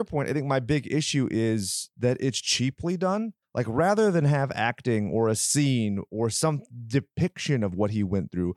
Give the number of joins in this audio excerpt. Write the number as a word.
one